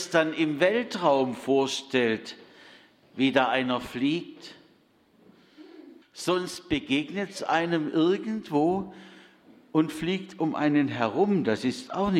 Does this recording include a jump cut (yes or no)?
yes